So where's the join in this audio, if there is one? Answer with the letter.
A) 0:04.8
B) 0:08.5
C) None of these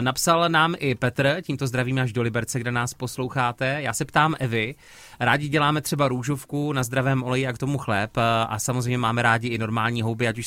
C